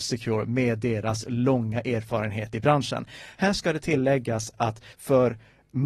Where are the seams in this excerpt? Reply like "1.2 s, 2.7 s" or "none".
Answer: 4.9 s